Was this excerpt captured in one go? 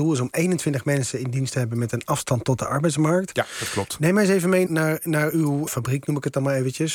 no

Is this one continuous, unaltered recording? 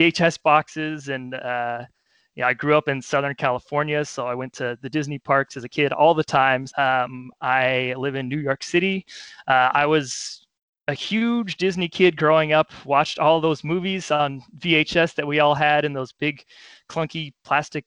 no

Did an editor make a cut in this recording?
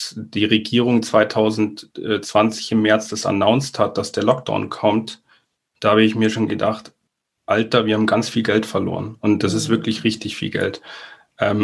no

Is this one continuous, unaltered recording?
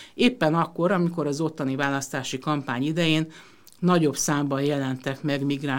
yes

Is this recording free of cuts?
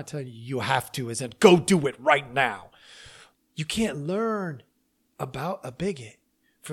no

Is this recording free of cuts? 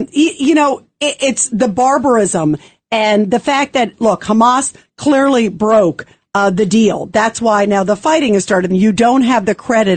no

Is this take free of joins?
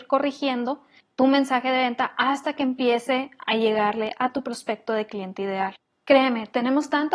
yes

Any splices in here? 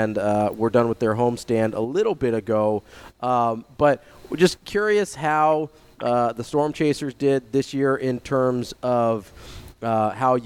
no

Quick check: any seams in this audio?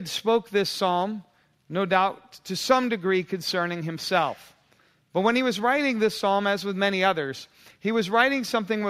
no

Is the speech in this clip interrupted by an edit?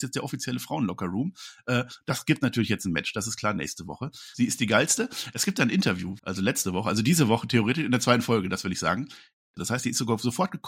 yes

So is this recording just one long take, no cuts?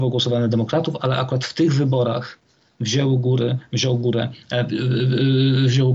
yes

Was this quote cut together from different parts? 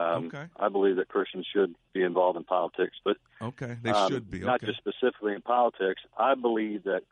no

